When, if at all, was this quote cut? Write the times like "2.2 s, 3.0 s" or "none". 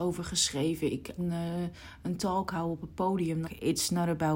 1.2 s, 3.4 s